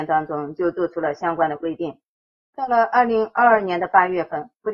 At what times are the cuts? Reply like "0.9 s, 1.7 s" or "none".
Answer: none